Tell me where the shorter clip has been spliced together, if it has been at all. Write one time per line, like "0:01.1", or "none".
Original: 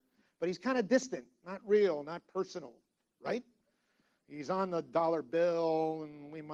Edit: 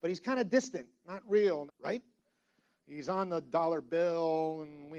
0:01.7